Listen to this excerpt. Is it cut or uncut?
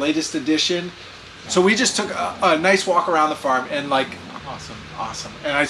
cut